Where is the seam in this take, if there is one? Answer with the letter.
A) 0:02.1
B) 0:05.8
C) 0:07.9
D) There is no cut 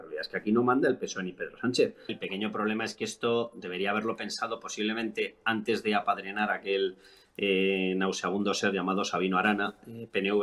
A